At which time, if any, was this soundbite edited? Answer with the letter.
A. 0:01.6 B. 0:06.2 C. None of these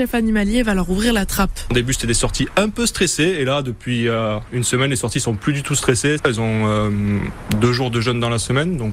B